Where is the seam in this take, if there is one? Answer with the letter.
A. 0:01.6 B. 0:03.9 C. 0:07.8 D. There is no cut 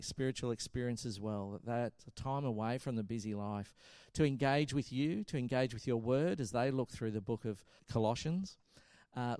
C